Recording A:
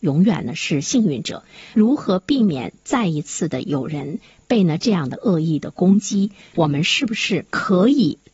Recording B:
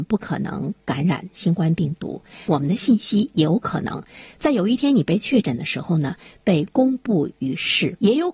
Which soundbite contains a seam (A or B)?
A